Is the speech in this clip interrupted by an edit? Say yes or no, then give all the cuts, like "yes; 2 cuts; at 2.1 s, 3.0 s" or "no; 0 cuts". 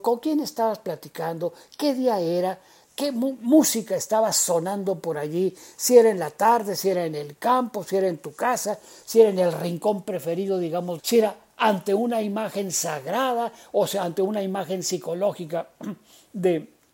yes; 1 cut; at 11.0 s